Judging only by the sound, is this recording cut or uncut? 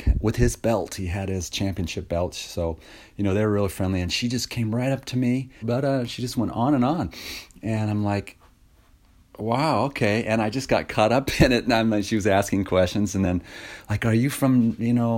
cut